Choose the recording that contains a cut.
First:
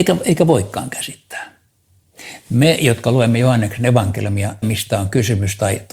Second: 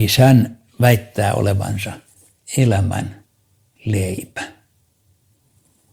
first; 1 cut; at 4.6 s

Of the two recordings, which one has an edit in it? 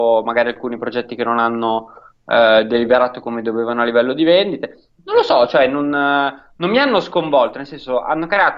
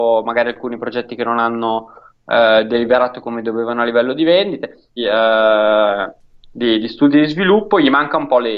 second; 1 cut; at 5.0 s

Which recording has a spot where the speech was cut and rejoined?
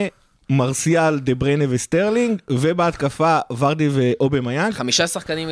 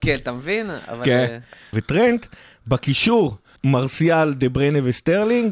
second; 2 cuts; at 1.7 s, 3.6 s

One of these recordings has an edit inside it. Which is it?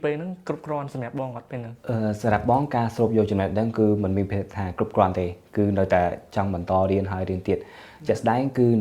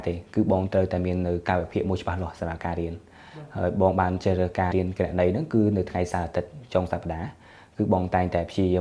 second; 1 cut; at 4.7 s

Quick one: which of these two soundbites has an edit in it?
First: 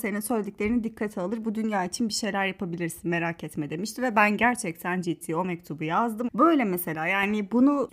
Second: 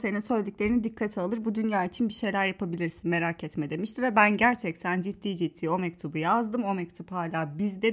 first; 2 cuts; at 5.0 s, 6.3 s

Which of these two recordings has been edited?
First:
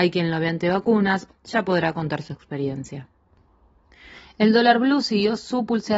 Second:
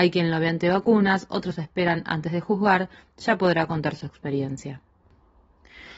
first; 1 cut; at 1.3 s

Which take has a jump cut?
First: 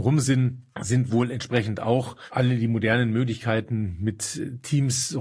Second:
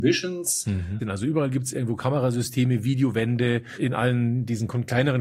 second; 1 cut; at 1.0 s

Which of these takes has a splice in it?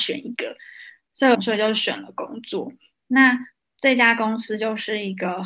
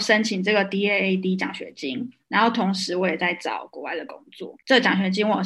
first; 1 cut; at 1.3 s

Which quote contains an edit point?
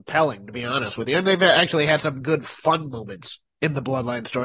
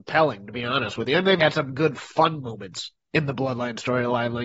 second; 1 cut; at 1.4 s

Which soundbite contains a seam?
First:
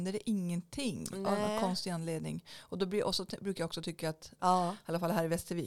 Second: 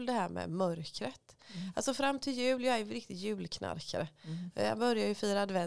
first; 1 cut; at 4.4 s

